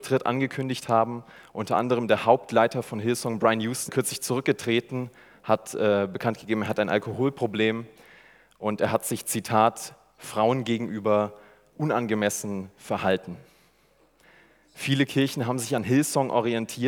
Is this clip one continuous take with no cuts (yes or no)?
no